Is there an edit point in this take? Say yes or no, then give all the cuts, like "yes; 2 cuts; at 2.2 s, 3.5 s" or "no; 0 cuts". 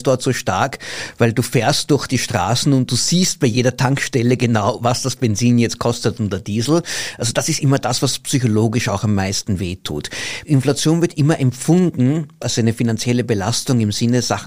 no; 0 cuts